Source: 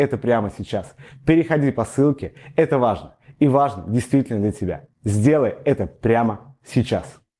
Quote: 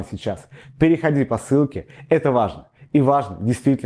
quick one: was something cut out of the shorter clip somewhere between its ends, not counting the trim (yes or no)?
no